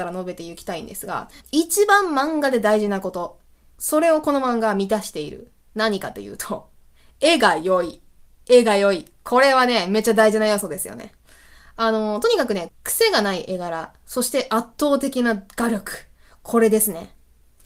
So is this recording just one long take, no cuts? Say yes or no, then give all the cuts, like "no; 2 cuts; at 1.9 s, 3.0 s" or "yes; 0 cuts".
no; 1 cut; at 1.4 s